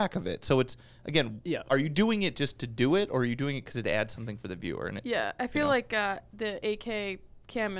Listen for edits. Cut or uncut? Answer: uncut